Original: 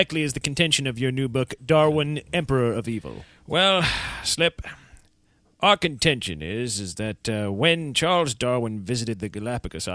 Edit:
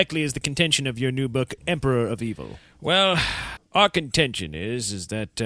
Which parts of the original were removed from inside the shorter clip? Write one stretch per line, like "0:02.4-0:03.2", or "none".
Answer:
0:01.6-0:02.2
0:04.2-0:05.4

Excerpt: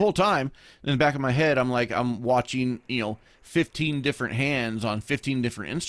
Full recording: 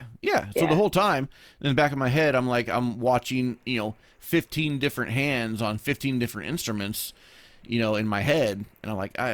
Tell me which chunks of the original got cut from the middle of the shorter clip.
none

